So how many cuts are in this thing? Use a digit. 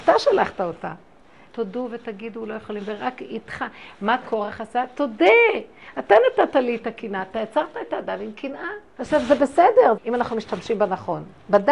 3